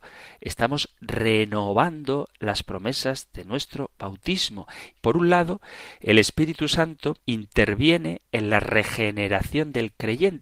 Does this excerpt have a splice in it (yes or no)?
yes